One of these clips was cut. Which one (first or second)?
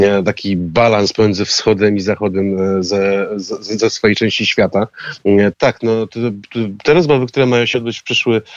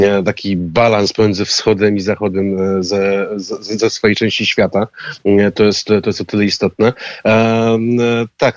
first